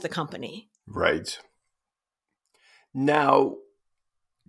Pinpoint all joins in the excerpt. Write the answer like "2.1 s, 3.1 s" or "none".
none